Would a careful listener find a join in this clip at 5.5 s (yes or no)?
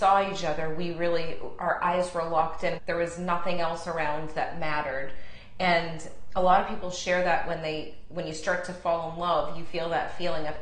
no